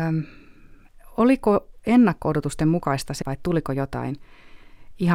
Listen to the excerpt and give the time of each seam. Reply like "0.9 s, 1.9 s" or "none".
3.2 s